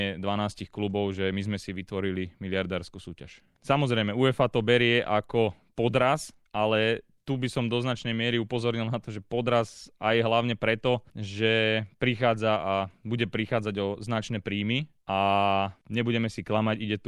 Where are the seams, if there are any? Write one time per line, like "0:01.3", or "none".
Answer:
0:03.6